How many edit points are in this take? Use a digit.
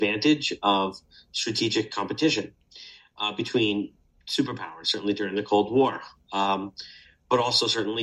0